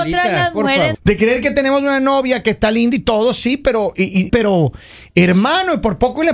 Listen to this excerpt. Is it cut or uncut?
cut